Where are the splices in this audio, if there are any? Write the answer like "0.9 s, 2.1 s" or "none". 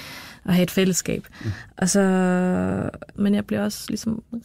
3.1 s